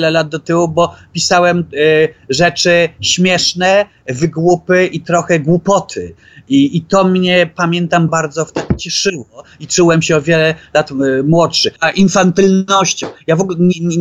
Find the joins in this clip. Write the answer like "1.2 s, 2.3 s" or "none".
8.1 s, 11.8 s